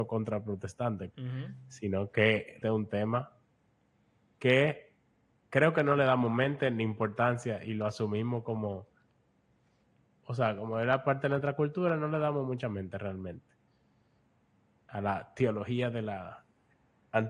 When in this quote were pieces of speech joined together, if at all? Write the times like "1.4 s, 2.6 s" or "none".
1.1 s, 2.6 s

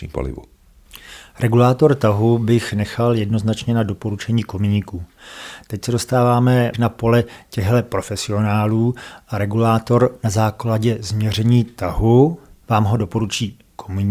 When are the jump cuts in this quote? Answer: 6.7 s

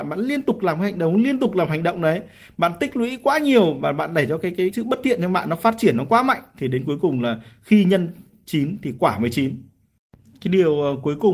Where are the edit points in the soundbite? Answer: 4.7 s

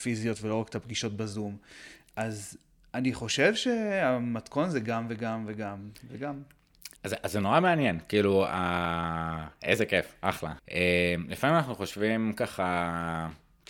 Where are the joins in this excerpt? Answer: 7.0 s, 10.6 s

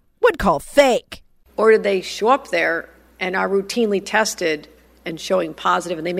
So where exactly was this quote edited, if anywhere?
1.5 s

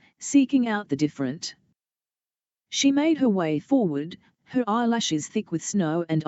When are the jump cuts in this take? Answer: none

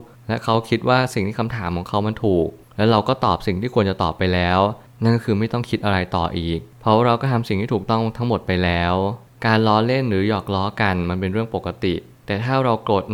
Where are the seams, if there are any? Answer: none

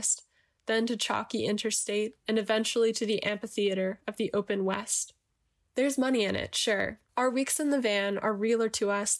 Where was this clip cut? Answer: 7.1 s

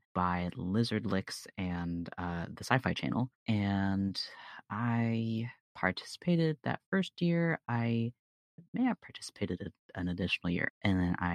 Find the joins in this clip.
none

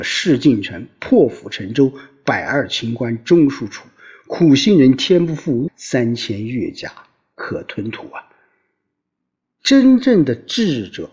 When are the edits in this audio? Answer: 5.7 s

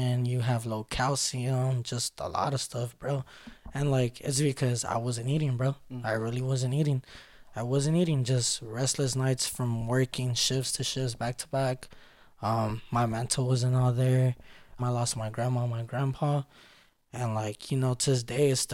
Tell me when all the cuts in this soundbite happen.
14.8 s

